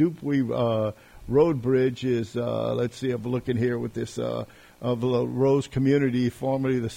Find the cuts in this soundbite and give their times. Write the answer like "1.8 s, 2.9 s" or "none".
none

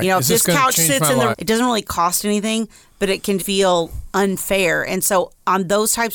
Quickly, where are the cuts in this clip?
1.3 s, 3.4 s

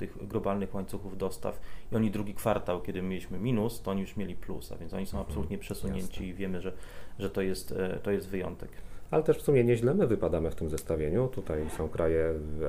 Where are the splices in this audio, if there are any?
none

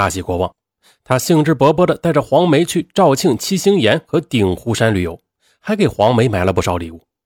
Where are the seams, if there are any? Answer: none

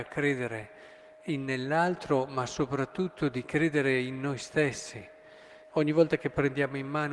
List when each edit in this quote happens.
5.7 s

